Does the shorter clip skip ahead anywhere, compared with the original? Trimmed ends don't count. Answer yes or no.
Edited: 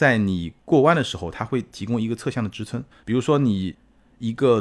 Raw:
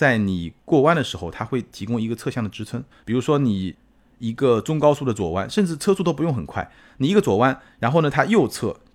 no